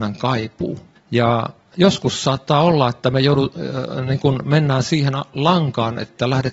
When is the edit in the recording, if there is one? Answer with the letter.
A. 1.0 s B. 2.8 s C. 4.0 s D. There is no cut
A